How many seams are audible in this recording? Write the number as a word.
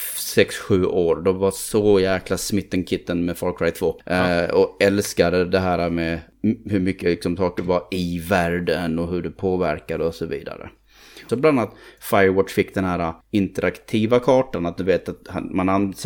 three